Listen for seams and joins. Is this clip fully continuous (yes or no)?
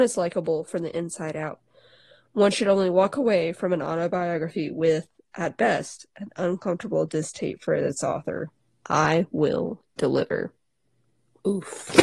yes